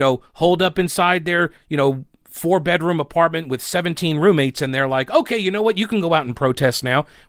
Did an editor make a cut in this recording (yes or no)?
no